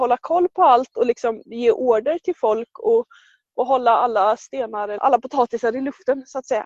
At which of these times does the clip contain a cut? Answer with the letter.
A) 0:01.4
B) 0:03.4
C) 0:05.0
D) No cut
C